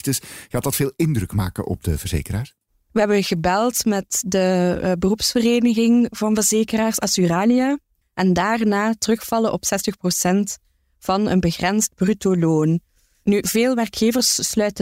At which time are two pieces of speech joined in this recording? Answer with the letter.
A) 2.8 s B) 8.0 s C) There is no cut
B